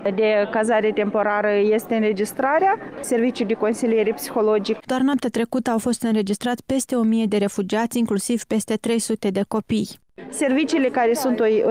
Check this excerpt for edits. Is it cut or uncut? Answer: cut